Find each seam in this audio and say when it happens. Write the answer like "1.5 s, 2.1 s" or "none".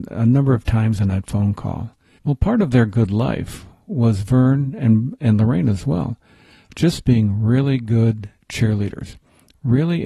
2.2 s